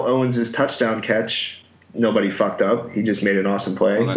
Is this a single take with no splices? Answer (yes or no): yes